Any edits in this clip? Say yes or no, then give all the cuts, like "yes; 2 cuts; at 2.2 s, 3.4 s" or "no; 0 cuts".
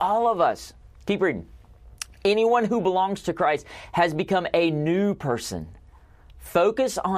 no; 0 cuts